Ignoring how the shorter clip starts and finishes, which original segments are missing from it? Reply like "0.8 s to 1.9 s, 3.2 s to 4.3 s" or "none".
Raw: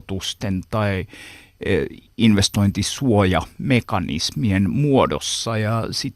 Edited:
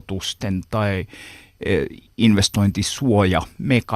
none